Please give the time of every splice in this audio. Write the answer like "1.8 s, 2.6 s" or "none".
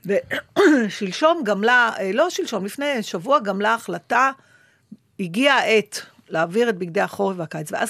none